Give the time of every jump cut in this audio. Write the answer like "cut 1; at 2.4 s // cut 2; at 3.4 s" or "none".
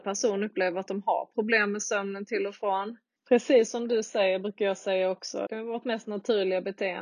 cut 1; at 3.2 s // cut 2; at 5.5 s